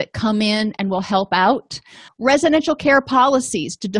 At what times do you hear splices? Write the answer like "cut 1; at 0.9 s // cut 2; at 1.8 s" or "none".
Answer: cut 1; at 2.1 s